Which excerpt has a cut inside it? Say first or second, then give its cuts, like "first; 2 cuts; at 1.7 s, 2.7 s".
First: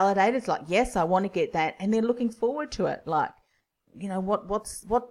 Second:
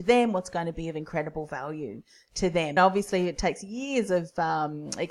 second; 1 cut; at 2.8 s